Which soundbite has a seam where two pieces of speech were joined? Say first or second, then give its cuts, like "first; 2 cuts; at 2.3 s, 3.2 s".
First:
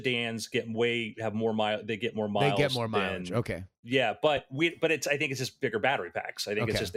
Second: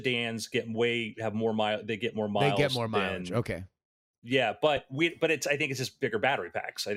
first; 1 cut; at 3.8 s